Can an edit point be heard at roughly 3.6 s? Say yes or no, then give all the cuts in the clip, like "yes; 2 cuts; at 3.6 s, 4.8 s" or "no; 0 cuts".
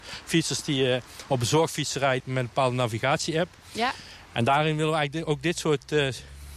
no; 1 cut; at 2.2 s